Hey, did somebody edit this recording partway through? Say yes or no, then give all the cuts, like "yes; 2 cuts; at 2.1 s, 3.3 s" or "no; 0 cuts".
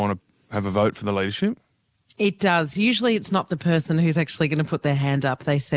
no; 0 cuts